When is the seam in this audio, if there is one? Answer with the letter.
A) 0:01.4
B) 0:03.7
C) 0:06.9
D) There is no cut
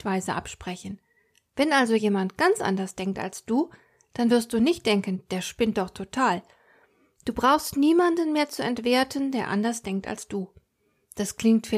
D